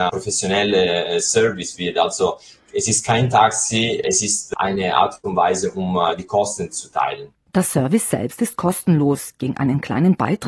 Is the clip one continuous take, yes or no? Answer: yes